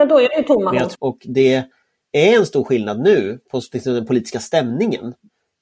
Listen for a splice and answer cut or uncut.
cut